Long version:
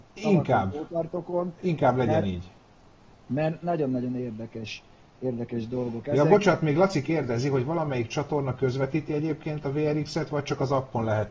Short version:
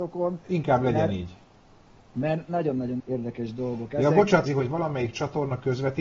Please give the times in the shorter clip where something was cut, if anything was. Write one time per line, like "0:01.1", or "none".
0:03.0
0:04.5